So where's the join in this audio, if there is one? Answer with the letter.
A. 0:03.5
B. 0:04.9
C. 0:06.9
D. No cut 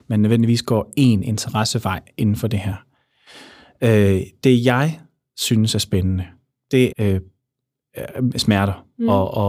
C